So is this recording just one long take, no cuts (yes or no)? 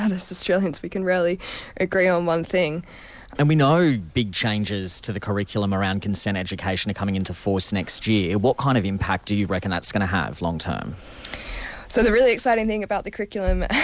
no